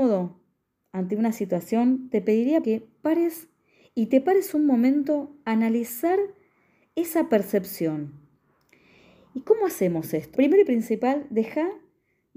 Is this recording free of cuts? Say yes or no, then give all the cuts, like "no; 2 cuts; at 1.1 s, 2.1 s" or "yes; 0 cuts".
no; 2 cuts; at 2.6 s, 10.3 s